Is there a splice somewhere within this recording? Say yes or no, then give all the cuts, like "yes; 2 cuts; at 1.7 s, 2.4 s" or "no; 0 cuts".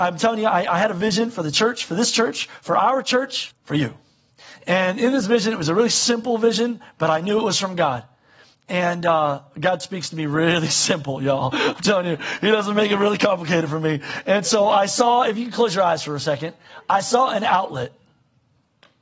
yes; 1 cut; at 3.5 s